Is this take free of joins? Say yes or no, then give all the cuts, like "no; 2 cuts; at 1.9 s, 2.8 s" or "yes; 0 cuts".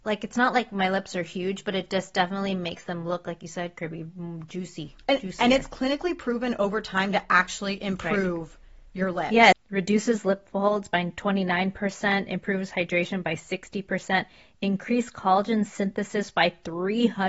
no; 1 cut; at 9.5 s